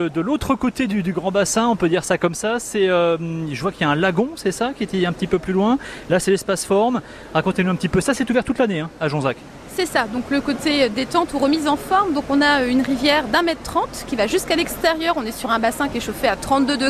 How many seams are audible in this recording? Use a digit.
0